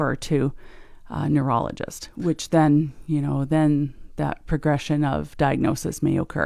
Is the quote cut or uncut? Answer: uncut